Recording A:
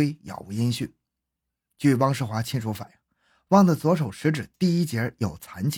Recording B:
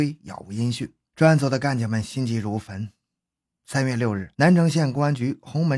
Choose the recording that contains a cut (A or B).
B